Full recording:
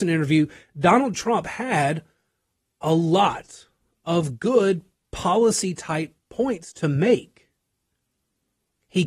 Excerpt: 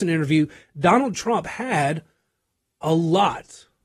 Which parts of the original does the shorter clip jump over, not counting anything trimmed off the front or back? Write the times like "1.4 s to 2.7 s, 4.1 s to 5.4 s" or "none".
none